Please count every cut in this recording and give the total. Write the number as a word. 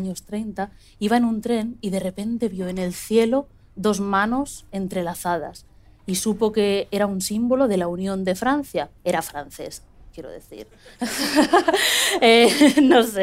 one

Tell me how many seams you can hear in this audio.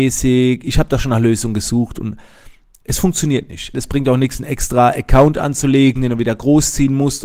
one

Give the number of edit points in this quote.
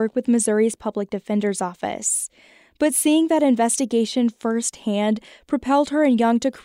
zero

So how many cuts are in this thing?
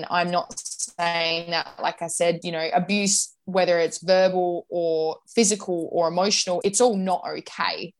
two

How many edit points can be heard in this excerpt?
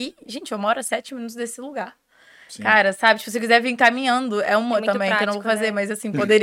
zero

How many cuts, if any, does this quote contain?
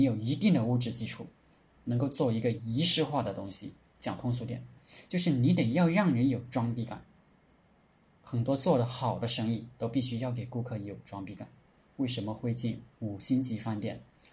one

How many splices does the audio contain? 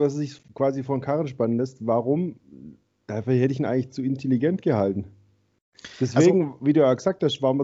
zero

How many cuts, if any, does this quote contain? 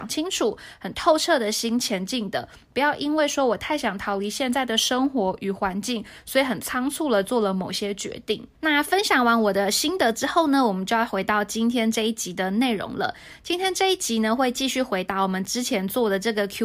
one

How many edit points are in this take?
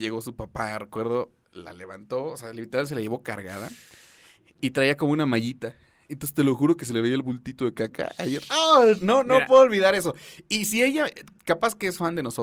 one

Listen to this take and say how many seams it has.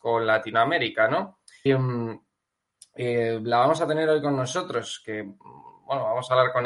one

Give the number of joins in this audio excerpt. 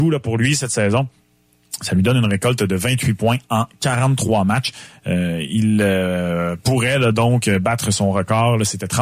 zero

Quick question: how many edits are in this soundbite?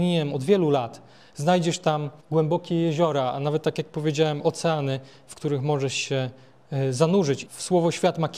two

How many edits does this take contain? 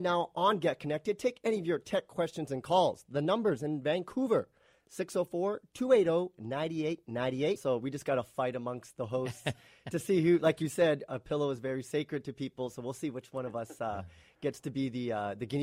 one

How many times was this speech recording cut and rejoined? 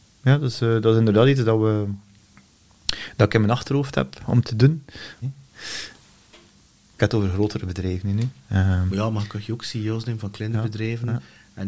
one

